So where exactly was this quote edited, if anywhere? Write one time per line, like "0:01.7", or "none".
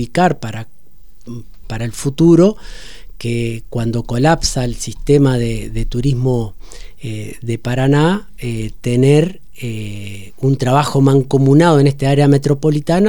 0:01.6